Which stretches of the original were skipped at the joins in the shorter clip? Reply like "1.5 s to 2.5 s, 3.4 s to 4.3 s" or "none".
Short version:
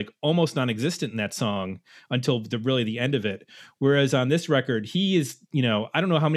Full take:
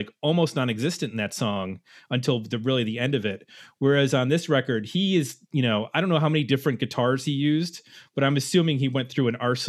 none

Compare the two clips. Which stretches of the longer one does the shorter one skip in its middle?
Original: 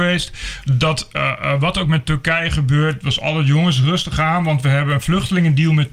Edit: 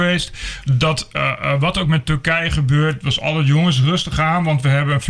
none

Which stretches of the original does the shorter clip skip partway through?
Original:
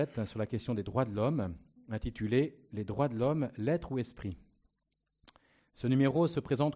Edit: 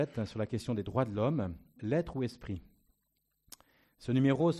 1.8 s to 3.5 s

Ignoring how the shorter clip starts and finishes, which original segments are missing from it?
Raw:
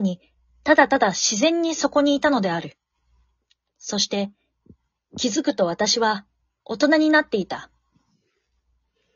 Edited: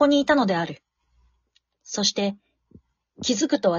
none

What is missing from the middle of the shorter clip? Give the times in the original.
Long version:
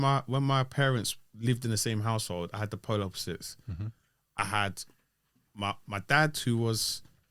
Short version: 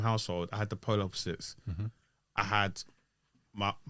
none

